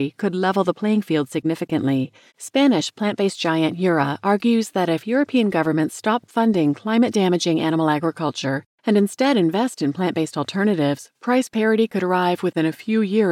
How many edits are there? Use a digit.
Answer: 1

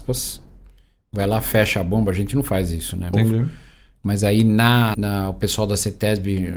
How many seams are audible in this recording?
2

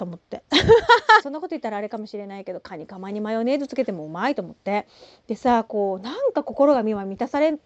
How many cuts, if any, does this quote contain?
1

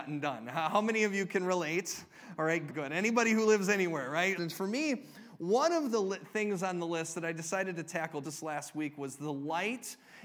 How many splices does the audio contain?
3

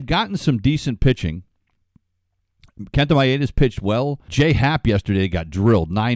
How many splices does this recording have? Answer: 1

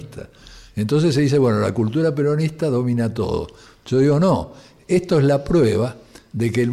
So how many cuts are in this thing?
0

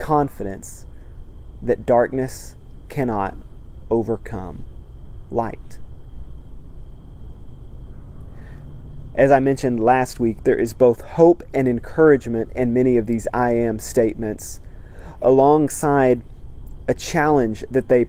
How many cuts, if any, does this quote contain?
1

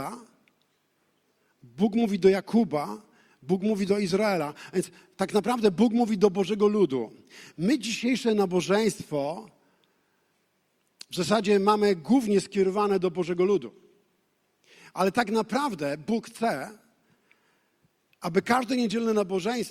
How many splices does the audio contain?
0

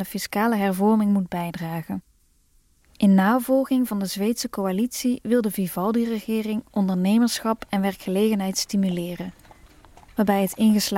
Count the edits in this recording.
0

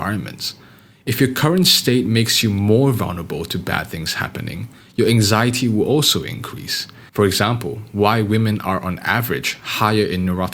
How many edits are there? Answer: 2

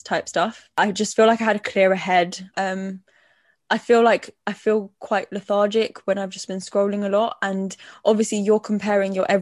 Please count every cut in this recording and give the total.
1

